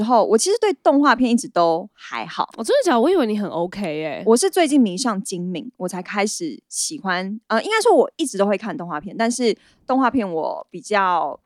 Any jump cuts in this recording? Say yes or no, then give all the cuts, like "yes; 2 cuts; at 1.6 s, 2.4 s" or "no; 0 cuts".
no; 0 cuts